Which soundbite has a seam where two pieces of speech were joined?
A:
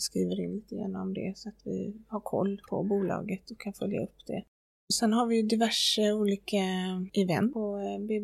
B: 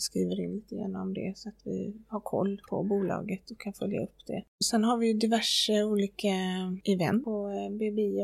B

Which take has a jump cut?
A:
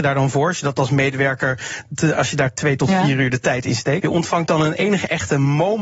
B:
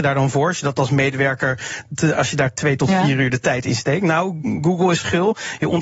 A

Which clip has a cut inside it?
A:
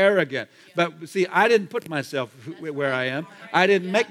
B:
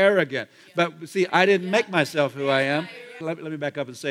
B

